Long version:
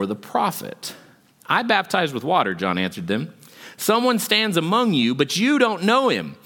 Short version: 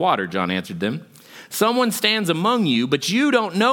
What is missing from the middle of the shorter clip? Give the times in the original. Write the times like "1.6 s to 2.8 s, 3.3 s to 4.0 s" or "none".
none